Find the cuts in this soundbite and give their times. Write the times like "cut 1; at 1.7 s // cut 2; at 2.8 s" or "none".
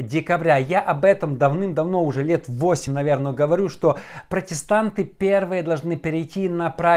none